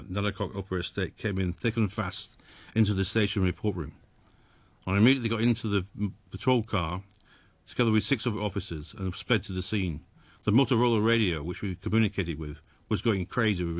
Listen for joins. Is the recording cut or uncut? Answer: uncut